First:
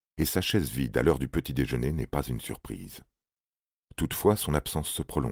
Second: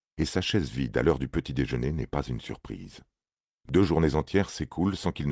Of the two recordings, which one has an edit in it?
second; 1 cut; at 3.5 s

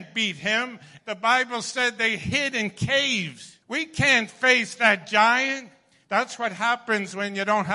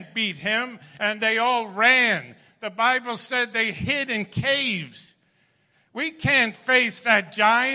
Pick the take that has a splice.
first; 2 cuts; at 1.0 s, 3.6 s

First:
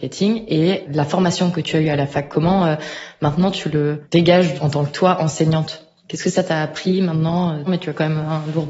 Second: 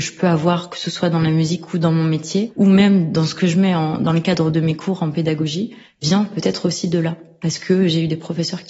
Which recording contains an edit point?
first; 1 cut; at 7.7 s

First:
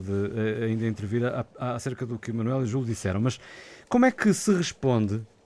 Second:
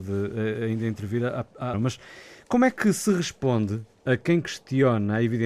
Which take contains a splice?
second; 1 cut; at 1.7 s

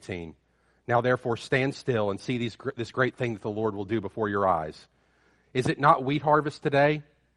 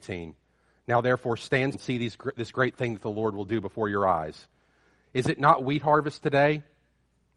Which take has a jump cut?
second; 1 cut; at 1.7 s

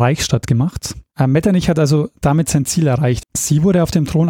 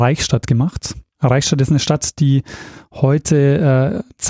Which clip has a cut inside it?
first; 2 cuts; at 1.1 s, 3.2 s

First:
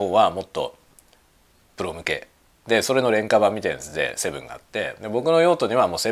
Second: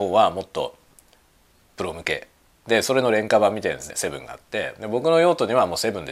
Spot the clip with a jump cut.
second; 1 cut; at 3.9 s

